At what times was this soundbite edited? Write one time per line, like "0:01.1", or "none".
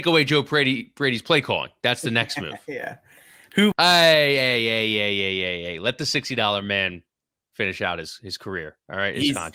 0:03.7